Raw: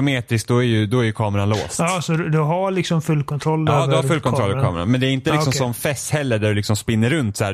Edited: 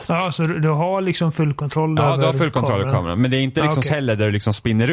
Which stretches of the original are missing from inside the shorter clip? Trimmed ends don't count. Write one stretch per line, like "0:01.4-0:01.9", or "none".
0:05.6-0:06.1